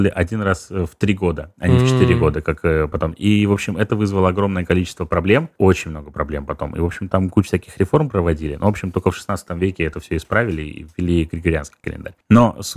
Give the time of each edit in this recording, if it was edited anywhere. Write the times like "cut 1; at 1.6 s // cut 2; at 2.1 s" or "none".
none